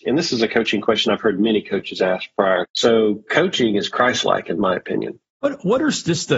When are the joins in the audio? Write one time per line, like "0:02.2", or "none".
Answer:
0:02.6